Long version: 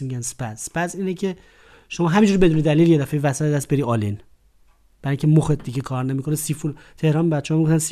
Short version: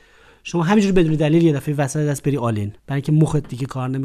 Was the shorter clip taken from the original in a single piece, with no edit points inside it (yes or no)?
no